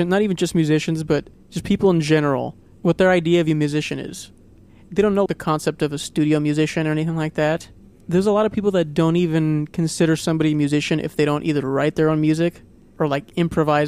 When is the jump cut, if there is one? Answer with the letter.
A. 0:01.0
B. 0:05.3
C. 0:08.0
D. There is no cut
B